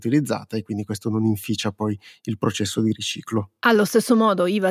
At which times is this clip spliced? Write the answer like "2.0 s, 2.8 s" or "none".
none